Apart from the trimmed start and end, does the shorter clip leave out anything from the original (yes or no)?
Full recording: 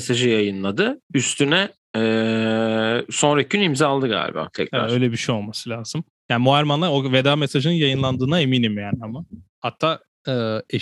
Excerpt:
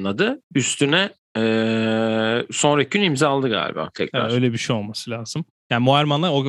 no